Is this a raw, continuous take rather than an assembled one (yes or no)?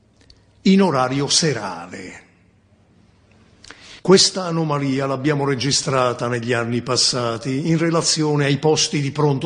no